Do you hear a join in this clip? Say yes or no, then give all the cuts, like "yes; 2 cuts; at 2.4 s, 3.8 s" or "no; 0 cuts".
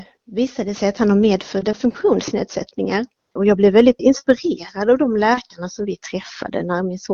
yes; 1 cut; at 3.3 s